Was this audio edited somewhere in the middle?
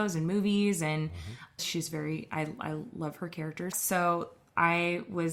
yes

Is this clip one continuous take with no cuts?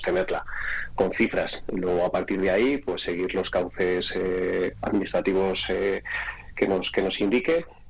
yes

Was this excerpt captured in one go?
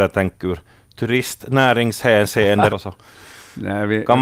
no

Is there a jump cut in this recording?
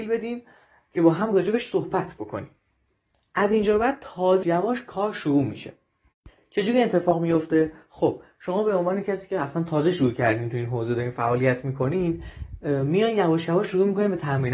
yes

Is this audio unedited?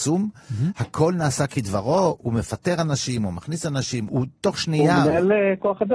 no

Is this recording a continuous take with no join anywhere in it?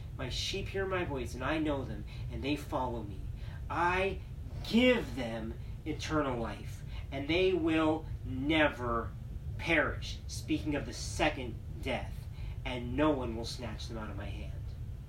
yes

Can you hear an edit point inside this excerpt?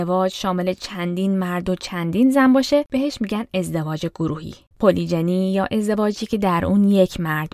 yes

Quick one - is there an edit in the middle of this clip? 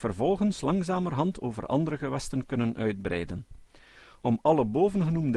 no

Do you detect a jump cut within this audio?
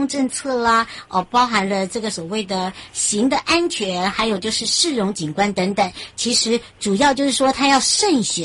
no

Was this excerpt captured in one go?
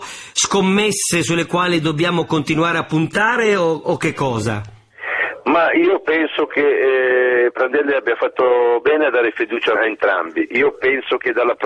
no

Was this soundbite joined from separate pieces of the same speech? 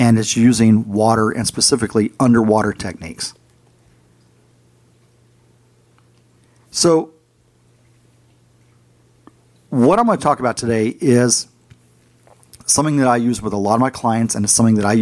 no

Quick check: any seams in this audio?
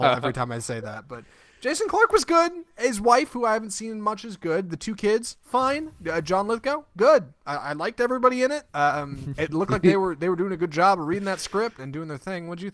yes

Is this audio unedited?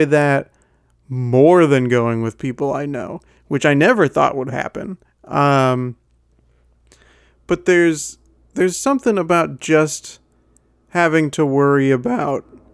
yes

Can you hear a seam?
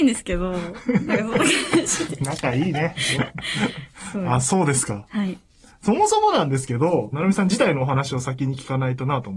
yes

